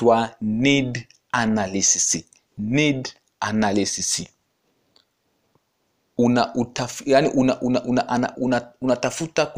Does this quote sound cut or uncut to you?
cut